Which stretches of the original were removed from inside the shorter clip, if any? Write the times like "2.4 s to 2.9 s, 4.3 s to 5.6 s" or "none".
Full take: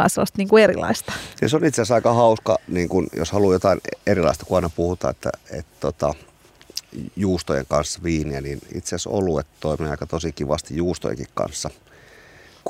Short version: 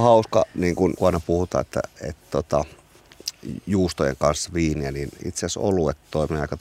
3.1 s to 4.5 s